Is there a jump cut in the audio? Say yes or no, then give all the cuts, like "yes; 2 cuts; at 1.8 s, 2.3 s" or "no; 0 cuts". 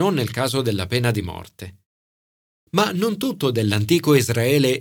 yes; 1 cut; at 2.6 s